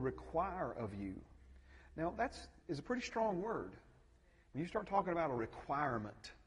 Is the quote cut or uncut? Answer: cut